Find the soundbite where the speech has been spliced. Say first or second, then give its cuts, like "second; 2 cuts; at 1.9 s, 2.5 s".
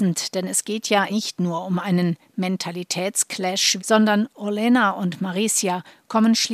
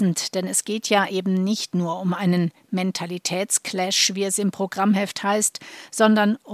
first; 2 cuts; at 1.1 s, 3.8 s